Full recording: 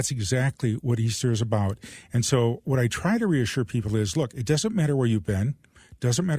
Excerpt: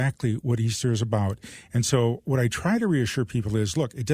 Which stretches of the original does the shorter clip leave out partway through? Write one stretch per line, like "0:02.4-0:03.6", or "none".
none